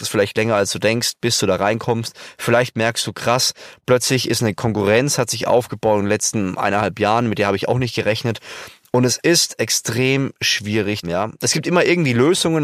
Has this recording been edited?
yes; 1 cut; at 11.0 s

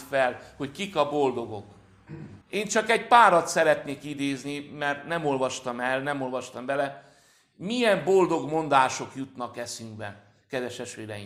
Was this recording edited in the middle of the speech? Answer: yes; 1 cut; at 2.4 s

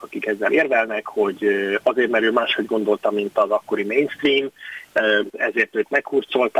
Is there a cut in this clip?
yes; 1 cut; at 5.3 s

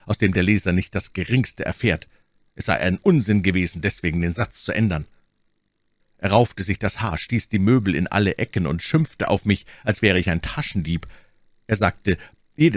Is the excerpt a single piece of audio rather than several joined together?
no; 1 cut; at 6.0 s

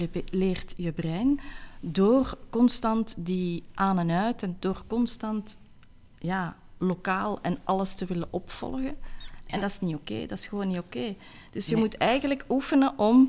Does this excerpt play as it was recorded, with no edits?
yes; 0 cuts

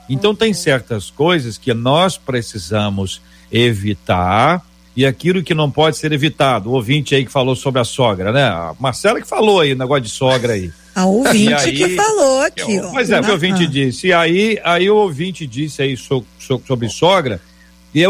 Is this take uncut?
no; 1 cut; at 13.2 s

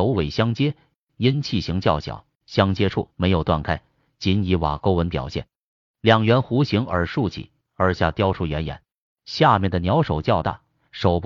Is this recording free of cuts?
yes; 0 cuts

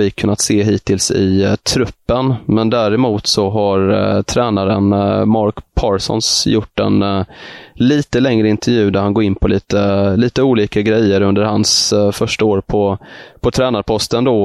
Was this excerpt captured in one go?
yes; 0 cuts

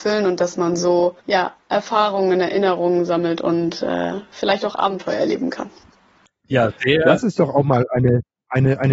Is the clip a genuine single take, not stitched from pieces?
no; 1 cut; at 1.2 s

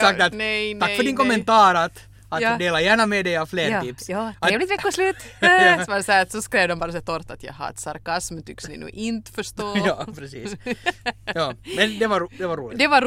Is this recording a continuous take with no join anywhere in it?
yes; 0 cuts

